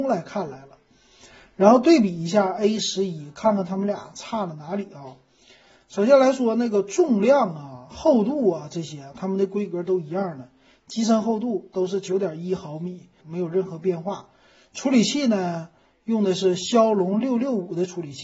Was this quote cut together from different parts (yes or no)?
yes